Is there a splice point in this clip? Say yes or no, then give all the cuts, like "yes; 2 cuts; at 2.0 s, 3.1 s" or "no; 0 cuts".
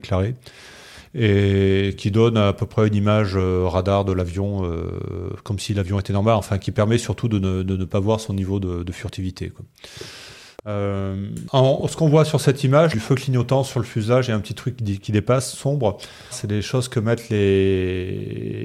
yes; 3 cuts; at 10.6 s, 12.9 s, 16.3 s